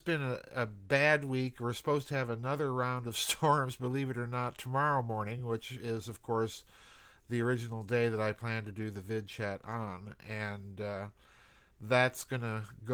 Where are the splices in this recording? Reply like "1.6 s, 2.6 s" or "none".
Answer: none